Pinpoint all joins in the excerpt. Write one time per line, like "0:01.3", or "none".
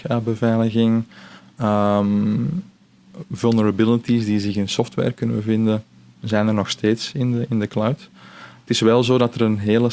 none